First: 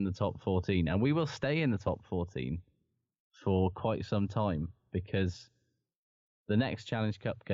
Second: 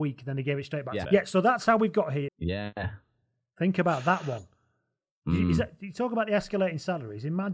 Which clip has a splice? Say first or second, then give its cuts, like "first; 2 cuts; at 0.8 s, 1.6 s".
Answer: second; 2 cuts; at 1.0 s, 2.3 s